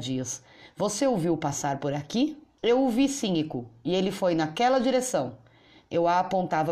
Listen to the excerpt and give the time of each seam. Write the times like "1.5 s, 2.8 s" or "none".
2.6 s